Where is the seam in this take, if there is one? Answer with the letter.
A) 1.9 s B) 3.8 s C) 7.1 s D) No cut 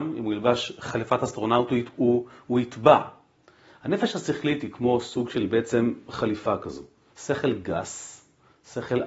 C